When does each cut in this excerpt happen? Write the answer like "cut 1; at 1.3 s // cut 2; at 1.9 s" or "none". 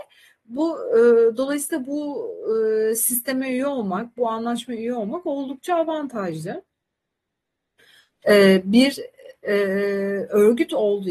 cut 1; at 8.1 s